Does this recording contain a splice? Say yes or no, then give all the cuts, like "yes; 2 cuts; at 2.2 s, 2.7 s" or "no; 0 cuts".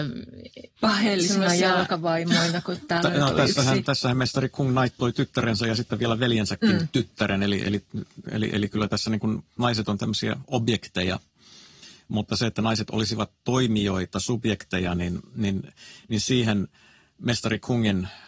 no; 0 cuts